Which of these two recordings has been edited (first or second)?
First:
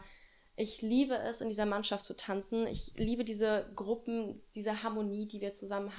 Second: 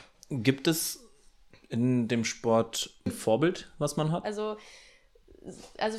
second